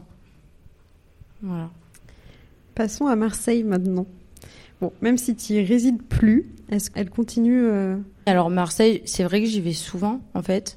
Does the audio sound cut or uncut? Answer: cut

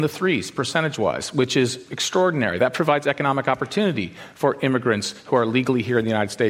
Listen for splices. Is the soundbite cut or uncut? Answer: uncut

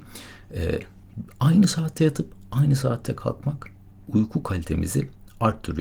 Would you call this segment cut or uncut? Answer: uncut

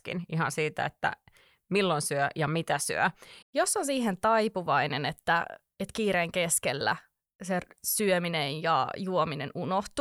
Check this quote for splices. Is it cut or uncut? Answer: cut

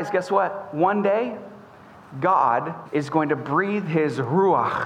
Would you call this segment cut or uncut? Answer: cut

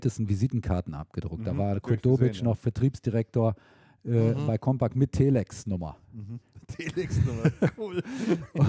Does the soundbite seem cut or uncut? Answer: uncut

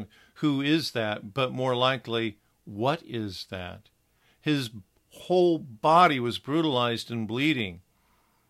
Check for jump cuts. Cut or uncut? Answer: uncut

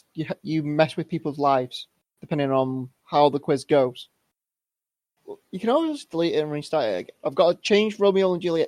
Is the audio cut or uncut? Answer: cut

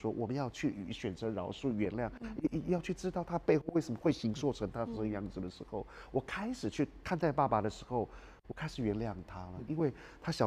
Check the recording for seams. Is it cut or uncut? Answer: uncut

